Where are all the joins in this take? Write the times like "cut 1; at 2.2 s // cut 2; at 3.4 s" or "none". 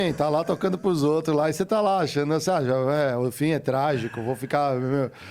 none